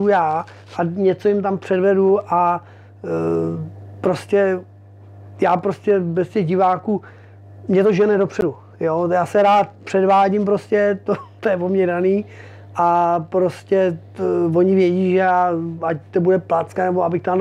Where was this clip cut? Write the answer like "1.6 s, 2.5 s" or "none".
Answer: none

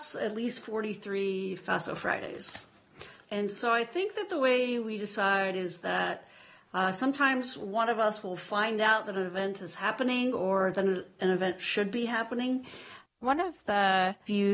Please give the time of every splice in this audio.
13.1 s

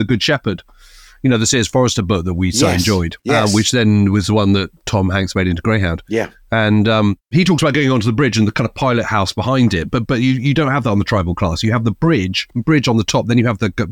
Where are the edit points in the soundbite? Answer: 10.1 s, 12.5 s

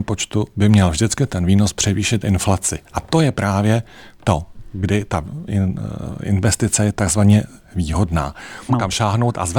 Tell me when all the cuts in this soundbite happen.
8.7 s

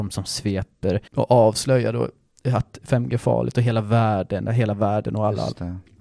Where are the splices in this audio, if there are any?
1.1 s, 4.5 s

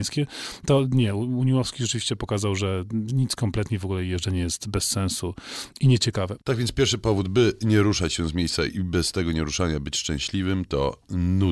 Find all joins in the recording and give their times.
none

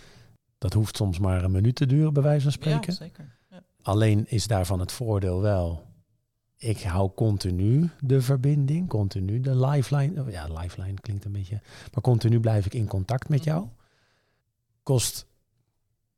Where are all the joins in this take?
none

